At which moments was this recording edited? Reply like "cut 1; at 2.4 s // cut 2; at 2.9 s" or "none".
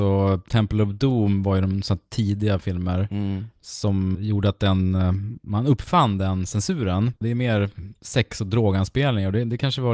cut 1; at 4.2 s // cut 2; at 7.2 s

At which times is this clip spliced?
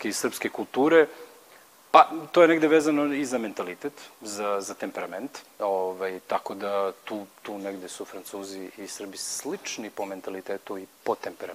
none

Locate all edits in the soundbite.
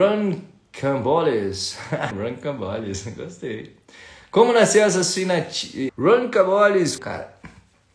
cut 1; at 2.1 s // cut 2; at 5.9 s // cut 3; at 7.0 s

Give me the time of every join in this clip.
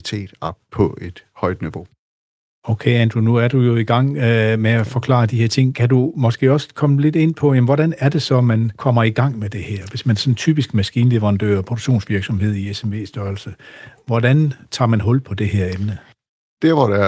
none

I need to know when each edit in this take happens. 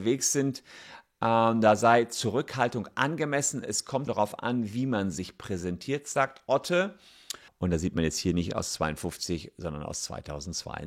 cut 1; at 4.1 s // cut 2; at 7.5 s

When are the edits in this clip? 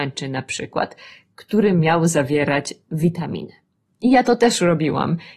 cut 1; at 3.9 s

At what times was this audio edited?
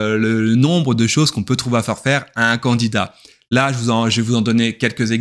none

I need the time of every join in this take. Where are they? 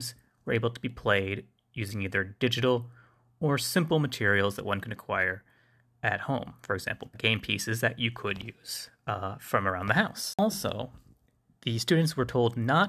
cut 1; at 7.1 s

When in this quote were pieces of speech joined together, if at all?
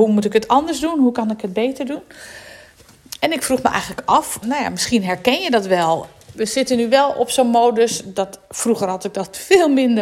cut 1; at 4.4 s

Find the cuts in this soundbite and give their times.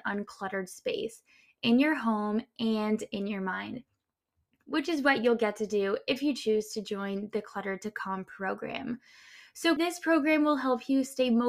cut 1; at 9.8 s

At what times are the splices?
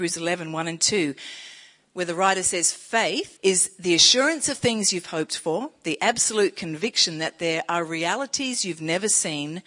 cut 1; at 3.4 s

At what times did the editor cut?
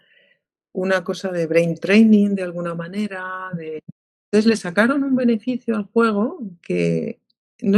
none

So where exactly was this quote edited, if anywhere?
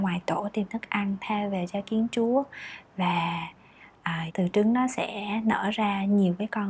cut 1; at 4.3 s

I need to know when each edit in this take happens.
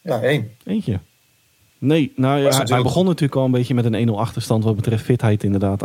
cut 1; at 1.7 s

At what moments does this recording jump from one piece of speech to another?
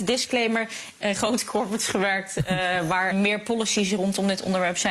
cut 1; at 1.0 s // cut 2; at 3.1 s

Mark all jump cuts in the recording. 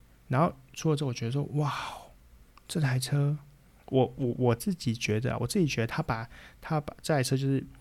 none

